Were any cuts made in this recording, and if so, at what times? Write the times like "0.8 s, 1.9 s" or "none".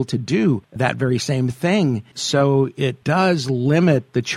none